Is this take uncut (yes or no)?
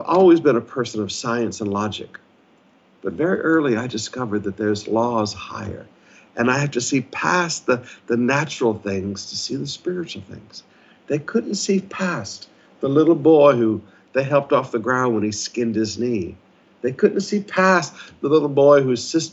yes